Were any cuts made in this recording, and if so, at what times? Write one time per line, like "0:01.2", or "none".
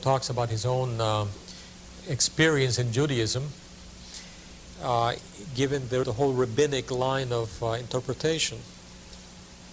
0:02.0
0:04.7
0:06.0